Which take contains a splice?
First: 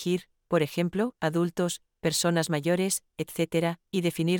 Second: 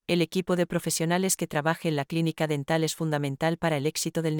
first; 1 cut; at 1.1 s

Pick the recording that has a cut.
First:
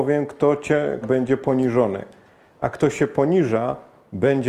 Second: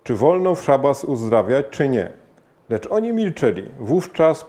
first; 1 cut; at 1.0 s

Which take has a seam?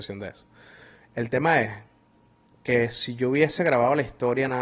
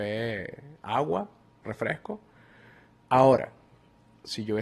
second; 1 cut; at 3.0 s

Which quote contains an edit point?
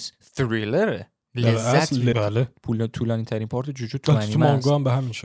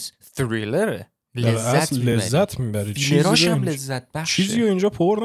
first; 1 cut; at 2.1 s

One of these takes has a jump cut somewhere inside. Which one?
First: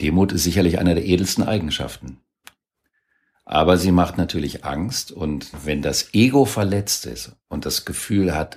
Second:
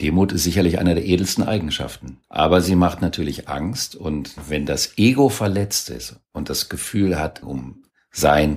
second; 2 cuts; at 2.2 s, 7.4 s

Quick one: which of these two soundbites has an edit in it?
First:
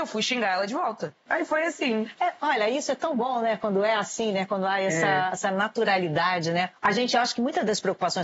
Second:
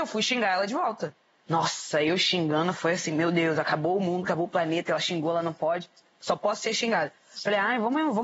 first; 1 cut; at 1.3 s

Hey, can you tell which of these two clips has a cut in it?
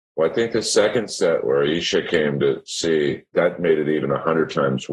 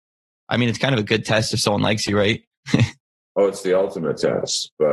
first; 1 cut; at 3.3 s

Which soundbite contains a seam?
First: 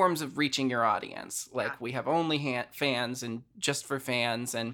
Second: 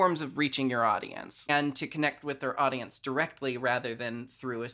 second; 1 cut; at 1.5 s

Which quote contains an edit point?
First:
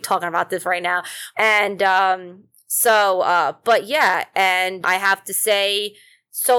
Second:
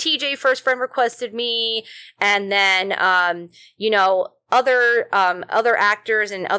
first; 2 cuts; at 1.3 s, 4.8 s

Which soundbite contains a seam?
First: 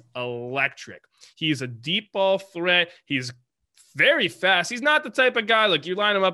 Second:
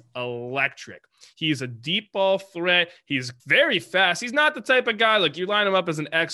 second; 1 cut; at 3.4 s

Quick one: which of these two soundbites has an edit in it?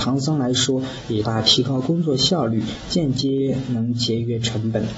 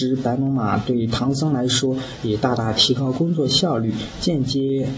first; 1 cut; at 1.2 s

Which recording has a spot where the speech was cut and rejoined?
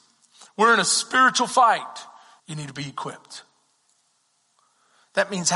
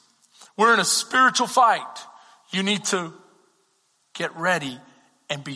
first; 1 cut; at 2.4 s

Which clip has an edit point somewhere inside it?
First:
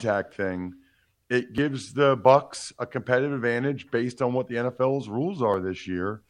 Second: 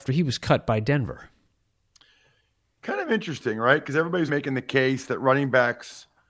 second; 1 cut; at 4.3 s

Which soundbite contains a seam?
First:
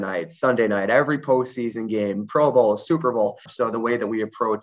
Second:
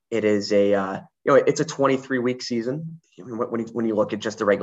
first; 1 cut; at 3.5 s

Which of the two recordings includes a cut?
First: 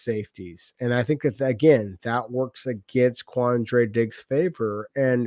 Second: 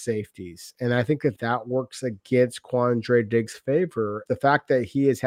second; 2 cuts; at 1.4 s, 4.3 s

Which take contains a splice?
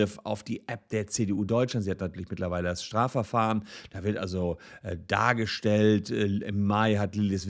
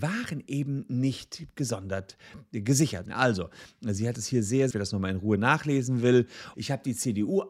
second; 3 cuts; at 3.1 s, 4.7 s, 6.5 s

